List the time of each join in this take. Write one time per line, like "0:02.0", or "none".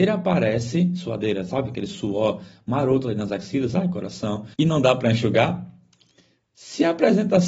0:04.5